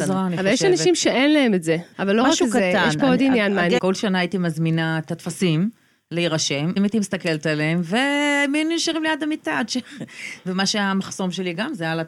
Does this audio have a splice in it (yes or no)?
yes